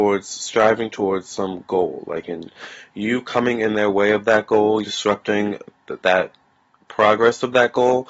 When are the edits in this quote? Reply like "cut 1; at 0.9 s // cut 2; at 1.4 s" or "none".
cut 1; at 4.8 s // cut 2; at 6.0 s

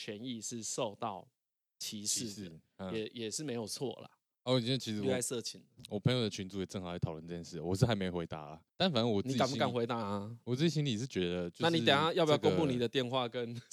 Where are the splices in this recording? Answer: cut 1; at 4.4 s // cut 2; at 8.7 s

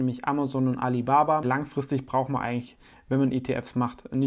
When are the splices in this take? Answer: cut 1; at 1.4 s

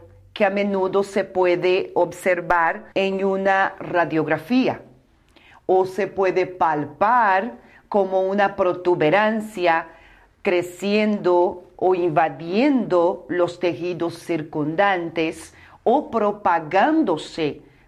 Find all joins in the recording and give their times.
cut 1; at 2.9 s

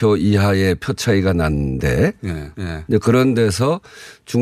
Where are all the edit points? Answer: cut 1; at 2.5 s

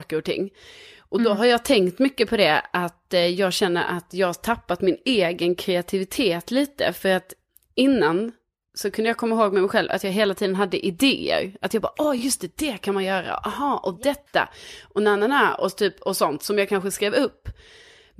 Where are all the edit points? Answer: none

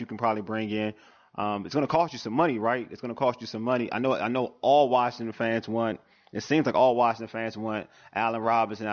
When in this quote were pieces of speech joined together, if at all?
none

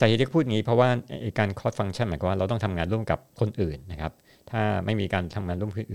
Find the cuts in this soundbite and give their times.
none

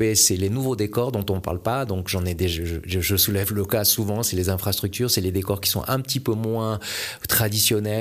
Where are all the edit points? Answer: none

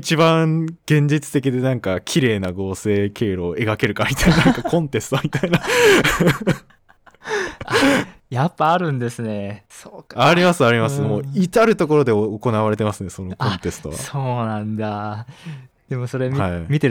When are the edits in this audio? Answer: none

